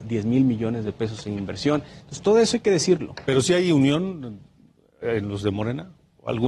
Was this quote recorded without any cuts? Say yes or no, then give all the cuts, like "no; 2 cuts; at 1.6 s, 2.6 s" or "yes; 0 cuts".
yes; 0 cuts